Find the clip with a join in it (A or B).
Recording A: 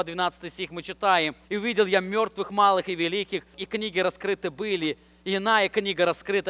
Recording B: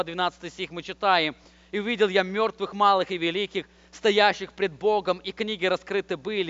A